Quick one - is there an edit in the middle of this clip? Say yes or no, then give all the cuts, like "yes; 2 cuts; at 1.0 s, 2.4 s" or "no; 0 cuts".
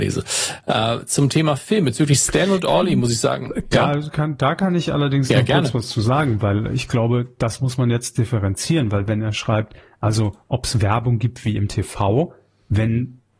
no; 0 cuts